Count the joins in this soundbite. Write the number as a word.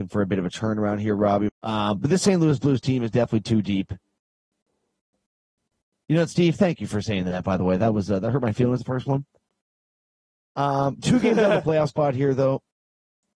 one